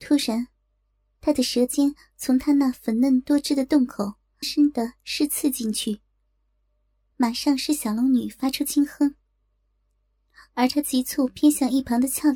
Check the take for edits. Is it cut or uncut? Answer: cut